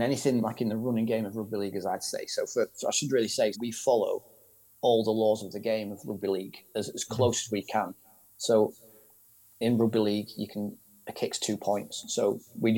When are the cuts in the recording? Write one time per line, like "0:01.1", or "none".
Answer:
0:03.5